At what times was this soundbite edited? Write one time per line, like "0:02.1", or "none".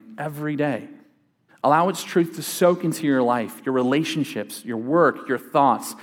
0:01.5